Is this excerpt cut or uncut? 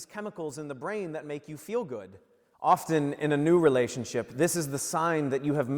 cut